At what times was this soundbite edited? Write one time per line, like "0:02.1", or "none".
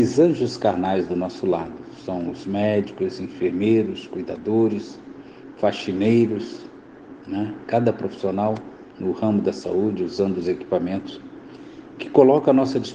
none

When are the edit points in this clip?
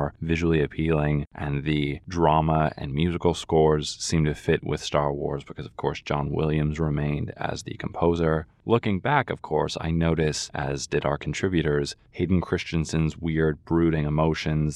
none

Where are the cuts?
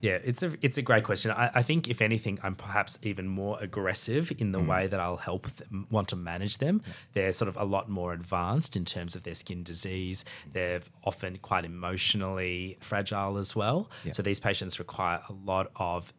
none

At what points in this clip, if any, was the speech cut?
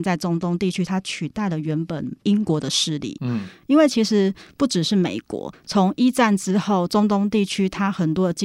0:03.2

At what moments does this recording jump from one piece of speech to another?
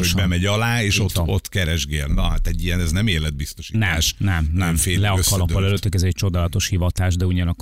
0:06.2

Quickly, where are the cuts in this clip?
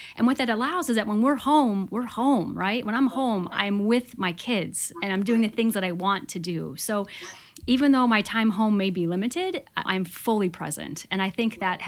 0:09.9

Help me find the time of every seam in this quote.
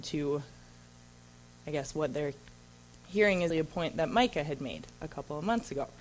0:03.5

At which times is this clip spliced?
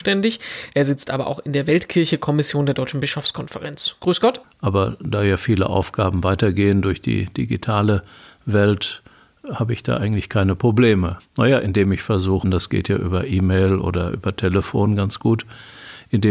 0:04.4
0:11.2
0:12.4

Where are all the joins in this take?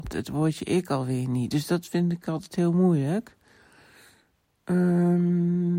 none

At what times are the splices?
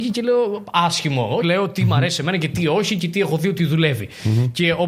0:01.4

